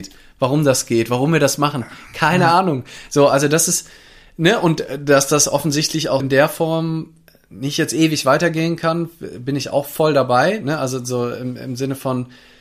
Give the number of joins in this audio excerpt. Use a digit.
1